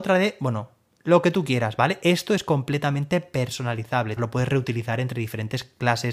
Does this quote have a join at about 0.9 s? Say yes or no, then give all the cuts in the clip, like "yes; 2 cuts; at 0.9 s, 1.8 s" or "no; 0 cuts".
no; 1 cut; at 4.2 s